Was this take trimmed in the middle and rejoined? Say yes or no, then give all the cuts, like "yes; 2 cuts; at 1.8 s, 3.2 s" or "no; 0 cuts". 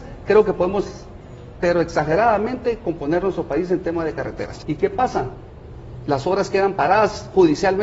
yes; 1 cut; at 4.6 s